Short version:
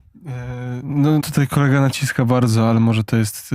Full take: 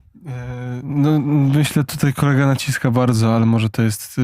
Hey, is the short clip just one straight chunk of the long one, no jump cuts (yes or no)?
no